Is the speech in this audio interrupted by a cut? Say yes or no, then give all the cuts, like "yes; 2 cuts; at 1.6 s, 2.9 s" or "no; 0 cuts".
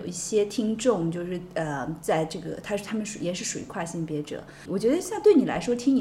yes; 1 cut; at 4.7 s